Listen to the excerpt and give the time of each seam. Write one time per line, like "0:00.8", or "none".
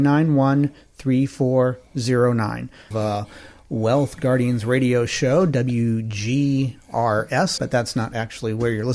0:02.9
0:07.6